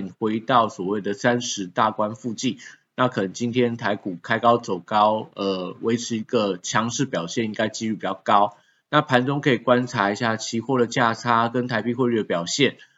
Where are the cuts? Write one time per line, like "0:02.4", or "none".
0:08.8